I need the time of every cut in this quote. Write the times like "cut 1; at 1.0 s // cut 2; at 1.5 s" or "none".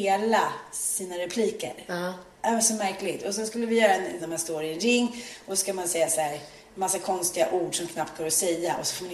cut 1; at 4.2 s